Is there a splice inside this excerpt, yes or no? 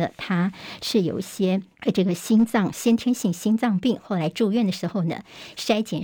yes